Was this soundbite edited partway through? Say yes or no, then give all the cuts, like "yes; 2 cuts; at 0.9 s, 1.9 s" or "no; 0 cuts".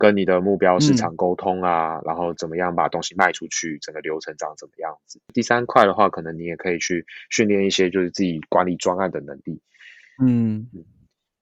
no; 0 cuts